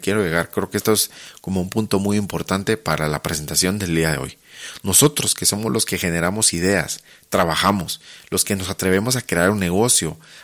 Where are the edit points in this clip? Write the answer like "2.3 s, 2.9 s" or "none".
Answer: none